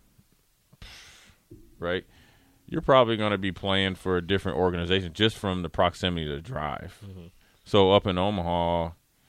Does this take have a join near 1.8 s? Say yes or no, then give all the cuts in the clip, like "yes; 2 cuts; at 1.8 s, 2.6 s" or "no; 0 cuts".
yes; 1 cut; at 1.8 s